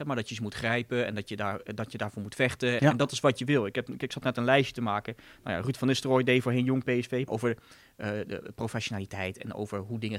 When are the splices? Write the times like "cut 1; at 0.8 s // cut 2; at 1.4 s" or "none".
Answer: cut 1; at 2.8 s // cut 2; at 7.3 s